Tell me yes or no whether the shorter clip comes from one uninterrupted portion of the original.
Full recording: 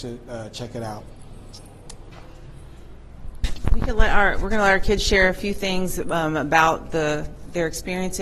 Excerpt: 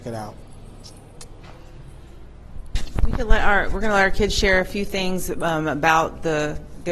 yes